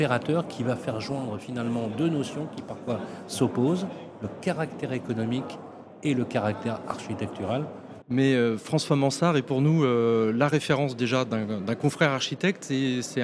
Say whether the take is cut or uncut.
cut